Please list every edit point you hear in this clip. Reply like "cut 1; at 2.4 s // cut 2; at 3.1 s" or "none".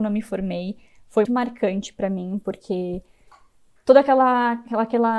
cut 1; at 1.2 s